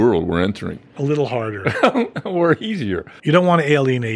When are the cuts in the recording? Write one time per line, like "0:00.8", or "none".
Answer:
0:03.2